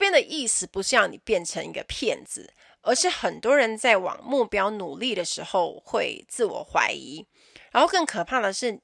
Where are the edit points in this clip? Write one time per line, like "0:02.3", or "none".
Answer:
none